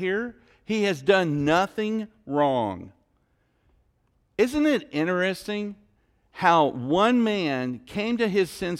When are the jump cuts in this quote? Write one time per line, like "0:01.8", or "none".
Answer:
none